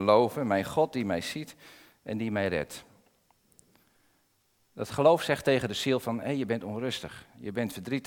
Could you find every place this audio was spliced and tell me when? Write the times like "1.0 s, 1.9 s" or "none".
none